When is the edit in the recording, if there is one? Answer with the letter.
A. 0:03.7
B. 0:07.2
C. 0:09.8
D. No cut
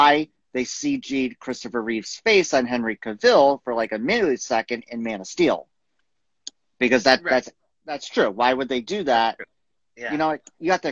D